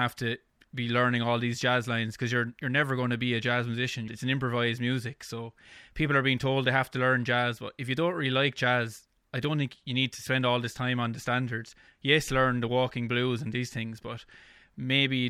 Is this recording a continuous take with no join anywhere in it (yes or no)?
no